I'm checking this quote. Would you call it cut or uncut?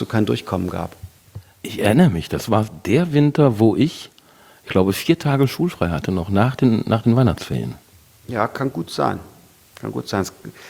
uncut